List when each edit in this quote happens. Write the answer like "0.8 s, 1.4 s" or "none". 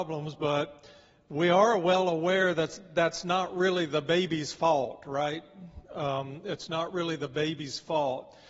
none